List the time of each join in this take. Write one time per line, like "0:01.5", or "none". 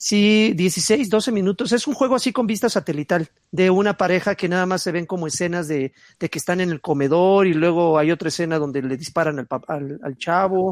none